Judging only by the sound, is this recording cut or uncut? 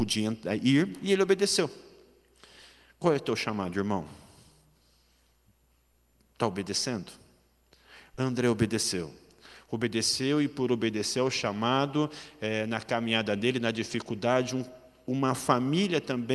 uncut